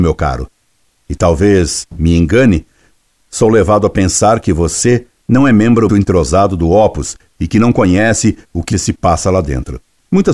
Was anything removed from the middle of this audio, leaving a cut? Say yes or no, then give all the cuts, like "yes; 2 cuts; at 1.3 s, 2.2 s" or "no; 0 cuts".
yes; 2 cuts; at 5.9 s, 8.7 s